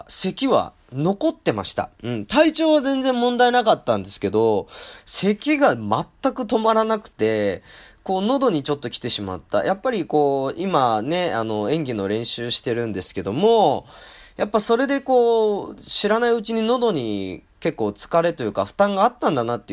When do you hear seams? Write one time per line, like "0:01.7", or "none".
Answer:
none